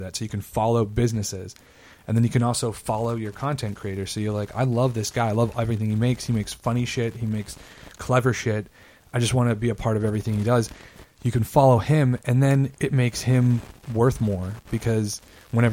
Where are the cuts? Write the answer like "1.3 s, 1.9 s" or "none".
12.7 s